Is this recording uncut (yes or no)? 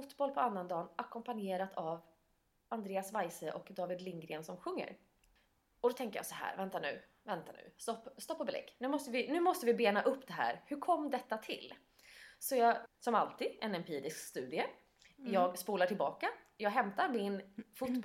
no